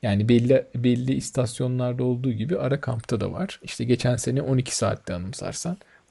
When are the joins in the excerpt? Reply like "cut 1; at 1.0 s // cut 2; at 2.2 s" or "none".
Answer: none